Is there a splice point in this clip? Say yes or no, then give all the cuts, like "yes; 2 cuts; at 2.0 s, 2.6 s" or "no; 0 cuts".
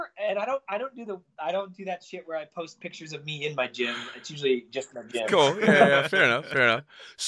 no; 0 cuts